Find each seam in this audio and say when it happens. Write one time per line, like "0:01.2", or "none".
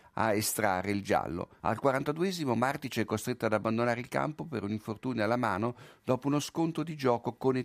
0:01.6